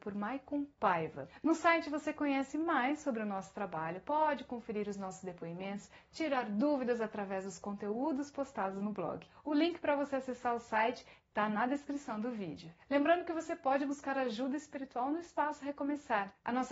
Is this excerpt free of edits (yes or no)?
yes